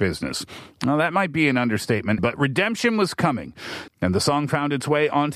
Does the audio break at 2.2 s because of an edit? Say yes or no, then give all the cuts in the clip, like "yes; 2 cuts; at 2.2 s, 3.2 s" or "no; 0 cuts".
yes; 2 cuts; at 2.2 s, 3.9 s